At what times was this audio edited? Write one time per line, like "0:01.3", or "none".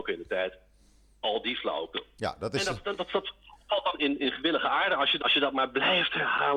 0:02.2
0:04.0
0:05.2

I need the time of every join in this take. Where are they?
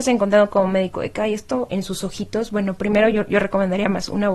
0:01.7

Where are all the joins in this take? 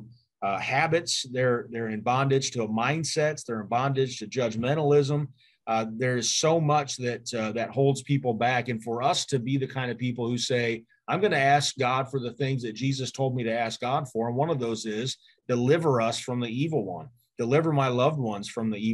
none

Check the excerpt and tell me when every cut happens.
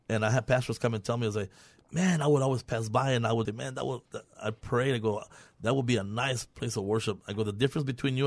0:03.4

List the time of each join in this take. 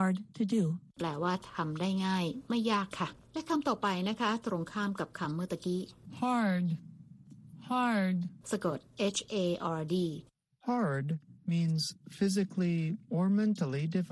0:08.4

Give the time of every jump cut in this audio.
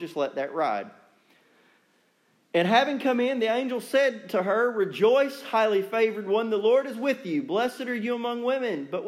none

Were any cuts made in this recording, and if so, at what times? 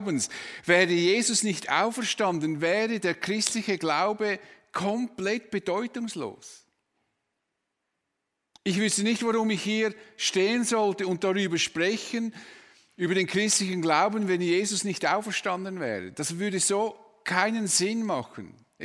none

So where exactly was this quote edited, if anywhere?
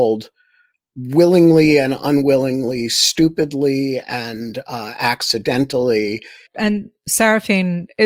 0:06.5

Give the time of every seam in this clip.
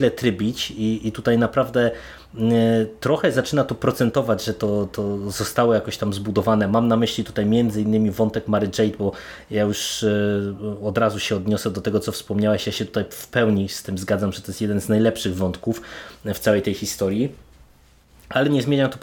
none

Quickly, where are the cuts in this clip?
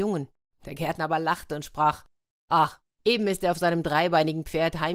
none

